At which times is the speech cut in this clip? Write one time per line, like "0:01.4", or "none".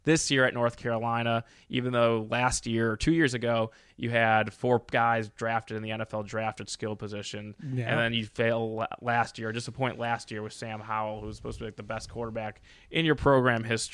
none